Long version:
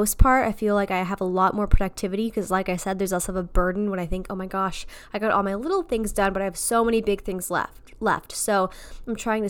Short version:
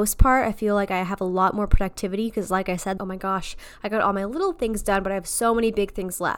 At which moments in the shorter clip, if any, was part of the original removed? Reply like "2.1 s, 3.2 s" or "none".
3.0 s